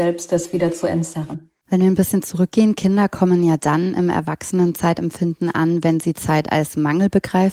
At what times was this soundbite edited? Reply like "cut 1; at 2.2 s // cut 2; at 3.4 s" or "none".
cut 1; at 1.6 s